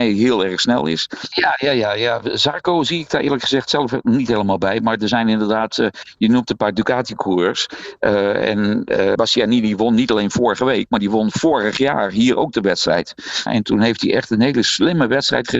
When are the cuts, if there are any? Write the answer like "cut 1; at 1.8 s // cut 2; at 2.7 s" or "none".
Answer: cut 1; at 1.3 s // cut 2; at 9.2 s // cut 3; at 13.5 s